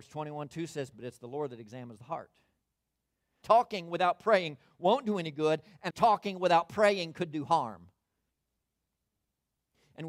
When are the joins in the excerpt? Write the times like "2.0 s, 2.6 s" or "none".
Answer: 0.9 s, 3.4 s, 5.9 s